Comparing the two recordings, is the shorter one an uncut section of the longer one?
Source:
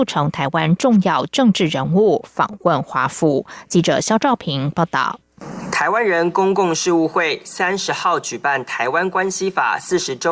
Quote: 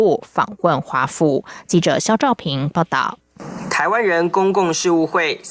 yes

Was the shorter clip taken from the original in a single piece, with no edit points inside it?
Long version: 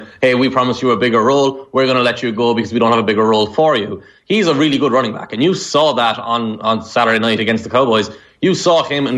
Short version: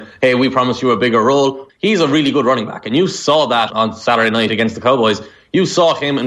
no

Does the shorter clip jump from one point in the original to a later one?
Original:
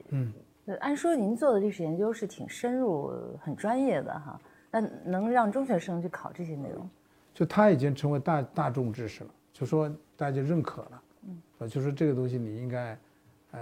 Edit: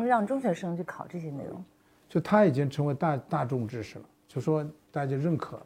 no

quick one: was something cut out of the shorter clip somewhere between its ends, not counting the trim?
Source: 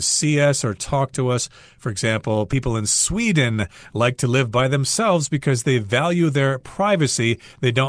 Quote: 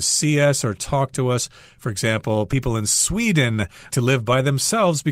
yes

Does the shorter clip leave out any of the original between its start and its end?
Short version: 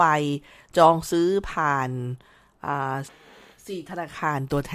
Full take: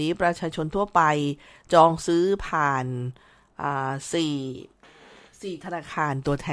yes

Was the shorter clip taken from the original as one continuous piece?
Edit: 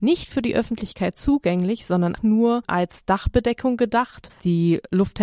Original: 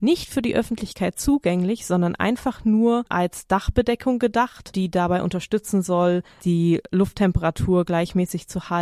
no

